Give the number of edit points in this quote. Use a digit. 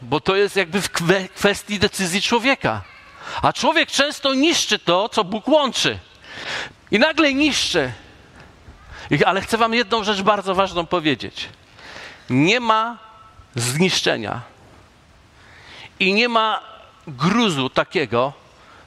1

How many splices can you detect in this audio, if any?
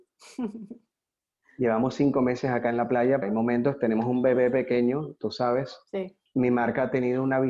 2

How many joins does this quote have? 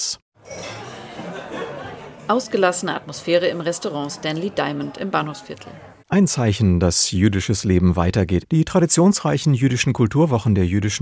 2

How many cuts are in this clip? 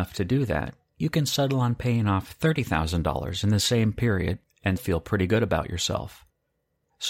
1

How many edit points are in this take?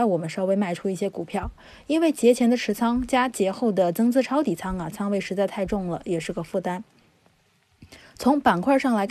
0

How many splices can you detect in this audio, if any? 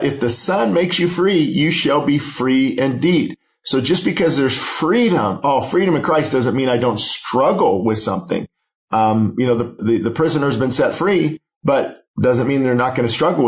2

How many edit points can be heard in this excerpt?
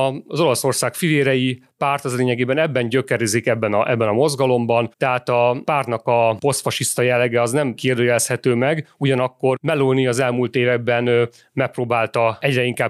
1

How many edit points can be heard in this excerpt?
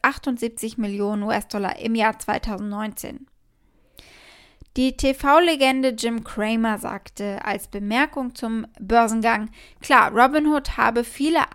0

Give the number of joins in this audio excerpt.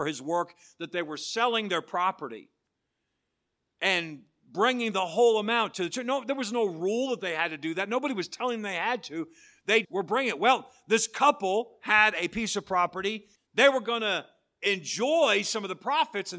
2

